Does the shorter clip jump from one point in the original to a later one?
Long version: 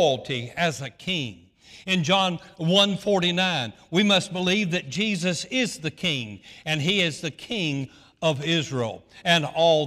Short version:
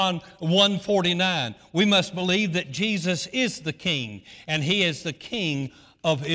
no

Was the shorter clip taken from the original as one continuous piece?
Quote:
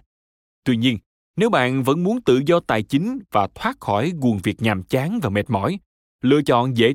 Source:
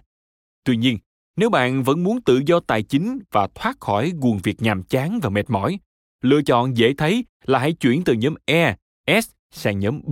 yes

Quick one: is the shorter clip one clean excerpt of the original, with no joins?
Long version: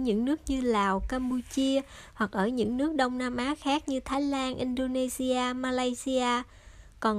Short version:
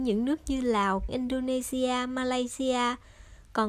no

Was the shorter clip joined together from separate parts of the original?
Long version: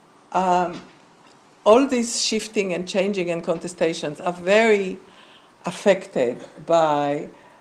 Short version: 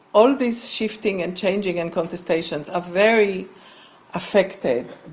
no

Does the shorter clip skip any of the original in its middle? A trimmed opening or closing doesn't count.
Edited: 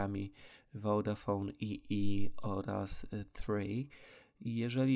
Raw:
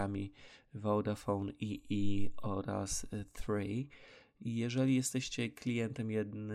no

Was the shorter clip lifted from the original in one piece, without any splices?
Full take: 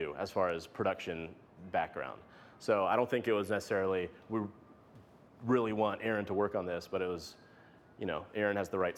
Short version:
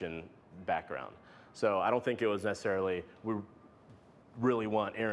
yes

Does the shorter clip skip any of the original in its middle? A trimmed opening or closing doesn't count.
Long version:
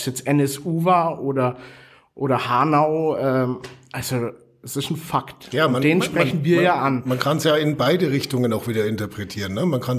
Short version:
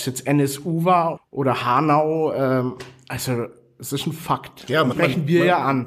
yes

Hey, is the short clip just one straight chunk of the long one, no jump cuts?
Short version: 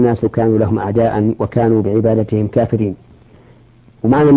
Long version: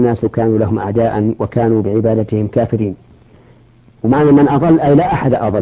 yes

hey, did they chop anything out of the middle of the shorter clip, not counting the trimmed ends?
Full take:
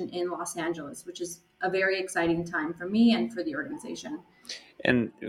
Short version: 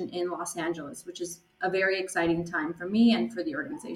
no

